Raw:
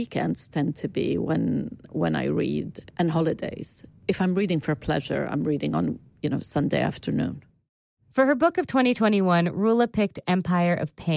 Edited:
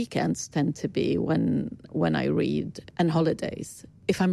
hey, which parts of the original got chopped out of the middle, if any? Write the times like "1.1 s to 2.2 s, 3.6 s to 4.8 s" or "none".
none